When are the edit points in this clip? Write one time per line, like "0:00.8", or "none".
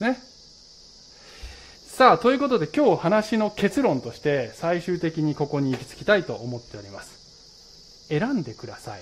0:01.7
0:08.0